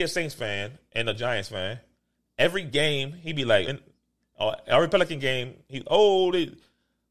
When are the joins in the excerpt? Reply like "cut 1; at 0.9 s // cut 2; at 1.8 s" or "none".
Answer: cut 1; at 3.6 s